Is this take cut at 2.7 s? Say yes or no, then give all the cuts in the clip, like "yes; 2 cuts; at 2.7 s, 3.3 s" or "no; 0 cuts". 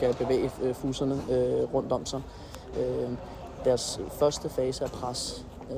yes; 1 cut; at 2.7 s